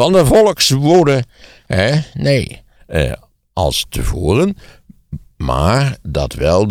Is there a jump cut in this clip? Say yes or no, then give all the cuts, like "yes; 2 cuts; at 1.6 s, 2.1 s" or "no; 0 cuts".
yes; 1 cut; at 2.8 s